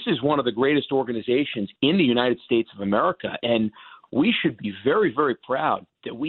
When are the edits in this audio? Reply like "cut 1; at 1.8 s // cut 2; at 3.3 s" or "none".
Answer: none